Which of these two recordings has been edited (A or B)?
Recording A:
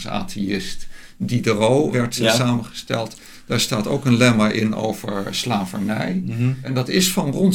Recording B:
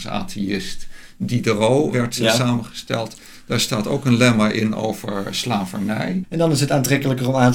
B